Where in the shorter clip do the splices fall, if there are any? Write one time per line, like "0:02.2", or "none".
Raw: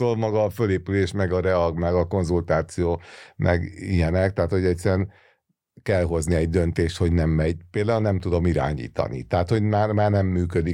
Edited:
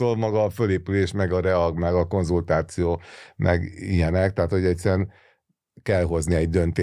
none